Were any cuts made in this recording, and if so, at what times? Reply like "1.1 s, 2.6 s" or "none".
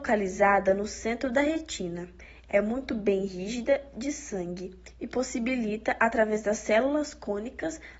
none